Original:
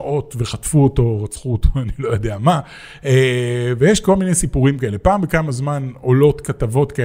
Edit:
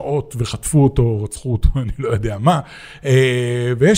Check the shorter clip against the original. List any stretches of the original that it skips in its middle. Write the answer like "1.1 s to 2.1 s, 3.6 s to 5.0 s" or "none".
none